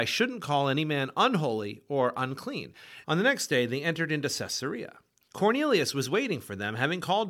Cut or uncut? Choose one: cut